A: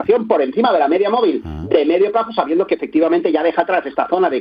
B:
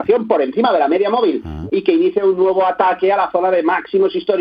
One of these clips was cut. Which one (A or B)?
B